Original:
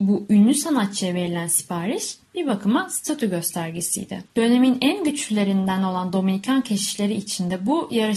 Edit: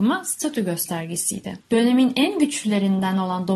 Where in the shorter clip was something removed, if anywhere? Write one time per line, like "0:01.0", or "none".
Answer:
none

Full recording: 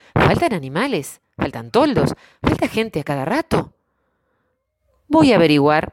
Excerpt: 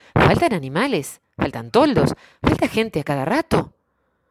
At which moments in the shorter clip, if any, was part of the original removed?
none

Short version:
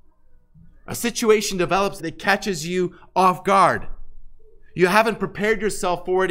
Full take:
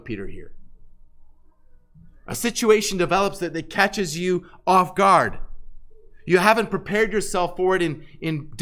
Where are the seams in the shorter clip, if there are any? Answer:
0:02.0

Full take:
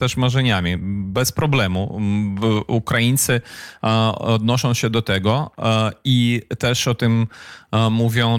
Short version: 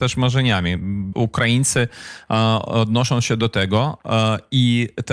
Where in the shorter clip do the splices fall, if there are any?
0:01.1

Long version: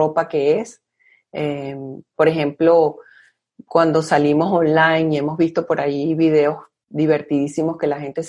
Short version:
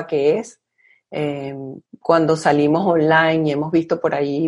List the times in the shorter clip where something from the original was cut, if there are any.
0:01.9

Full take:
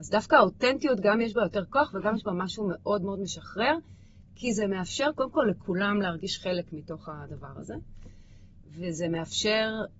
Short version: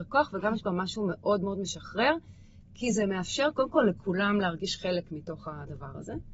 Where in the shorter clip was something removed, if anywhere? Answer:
none

